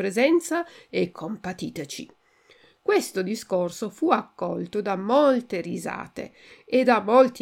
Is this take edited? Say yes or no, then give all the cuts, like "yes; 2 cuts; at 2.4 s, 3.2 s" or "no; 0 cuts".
no; 0 cuts